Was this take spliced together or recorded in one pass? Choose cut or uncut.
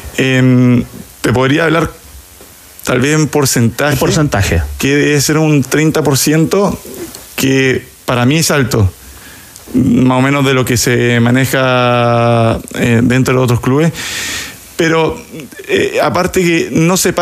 uncut